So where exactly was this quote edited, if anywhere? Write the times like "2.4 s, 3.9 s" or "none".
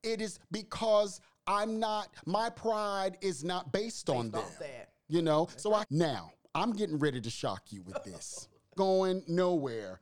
5.8 s, 8.8 s